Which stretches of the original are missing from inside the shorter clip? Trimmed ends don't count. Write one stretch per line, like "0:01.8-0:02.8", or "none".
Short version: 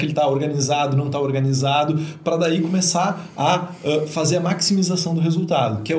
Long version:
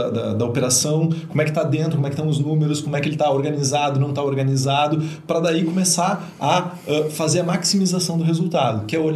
none